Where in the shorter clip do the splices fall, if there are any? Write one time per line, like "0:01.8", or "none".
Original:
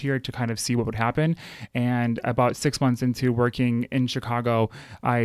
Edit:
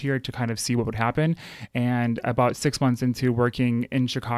none